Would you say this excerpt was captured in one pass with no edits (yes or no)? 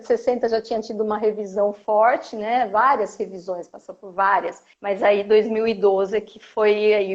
no